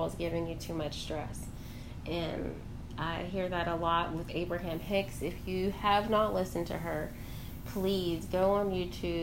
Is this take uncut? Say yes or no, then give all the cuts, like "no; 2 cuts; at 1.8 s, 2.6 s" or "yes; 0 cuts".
yes; 0 cuts